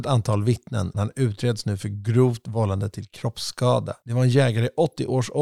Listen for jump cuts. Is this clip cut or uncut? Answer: cut